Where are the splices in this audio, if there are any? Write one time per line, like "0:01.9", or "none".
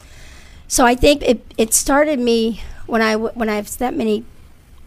0:01.2